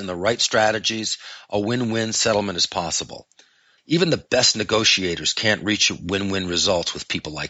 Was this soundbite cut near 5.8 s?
no; 1 cut; at 3.8 s

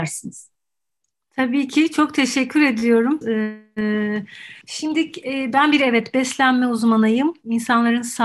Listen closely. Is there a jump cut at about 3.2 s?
yes; 2 cuts; at 3.2 s, 4.6 s

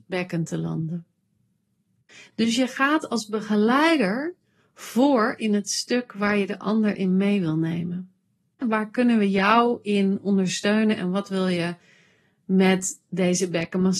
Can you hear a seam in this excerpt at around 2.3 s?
no; 1 cut; at 8.6 s

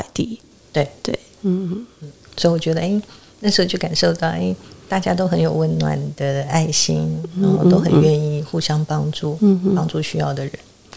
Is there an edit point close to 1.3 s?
yes; 1 cut; at 1.3 s

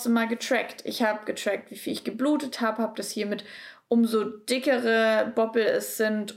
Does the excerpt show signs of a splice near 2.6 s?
no; 0 cuts

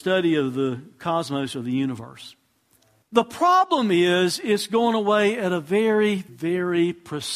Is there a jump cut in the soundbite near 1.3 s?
no; 2 cuts; at 3.0 s, 6.3 s

